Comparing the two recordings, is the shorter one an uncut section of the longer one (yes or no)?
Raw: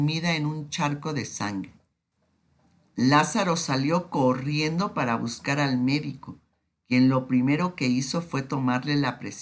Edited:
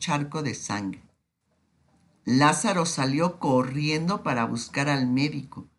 yes